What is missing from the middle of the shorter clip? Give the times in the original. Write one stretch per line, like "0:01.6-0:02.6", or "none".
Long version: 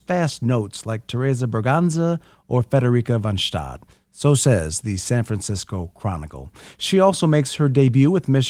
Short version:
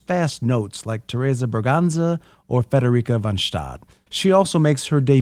0:04.1-0:06.7